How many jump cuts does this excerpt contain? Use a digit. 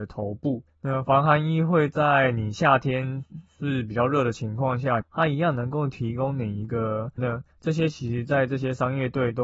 2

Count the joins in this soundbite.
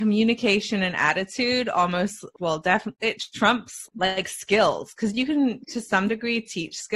2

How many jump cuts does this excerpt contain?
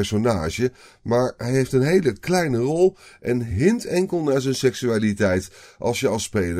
0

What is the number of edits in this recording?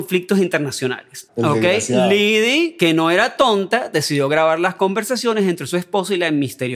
1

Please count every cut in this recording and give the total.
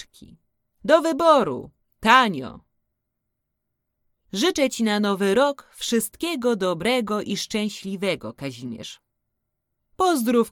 0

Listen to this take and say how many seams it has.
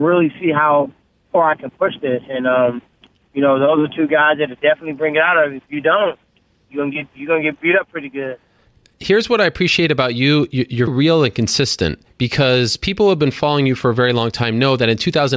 1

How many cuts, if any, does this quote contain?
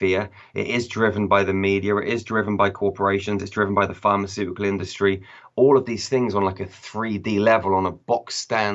0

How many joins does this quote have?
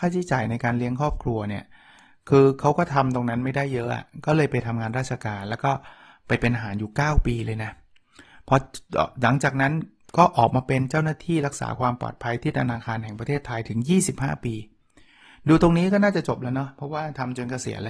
0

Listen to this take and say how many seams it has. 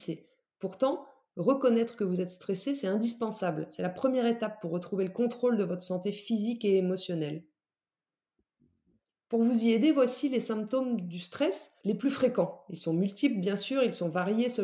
0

